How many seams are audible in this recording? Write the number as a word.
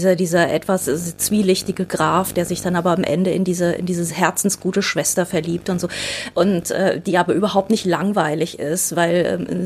zero